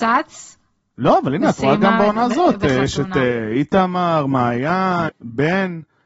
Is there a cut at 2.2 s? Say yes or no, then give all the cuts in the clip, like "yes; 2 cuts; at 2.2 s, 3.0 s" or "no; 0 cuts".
no; 1 cut; at 5.1 s